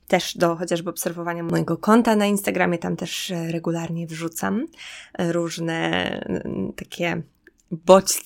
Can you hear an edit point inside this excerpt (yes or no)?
no